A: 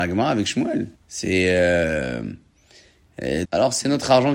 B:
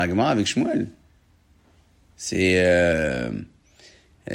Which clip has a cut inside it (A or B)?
A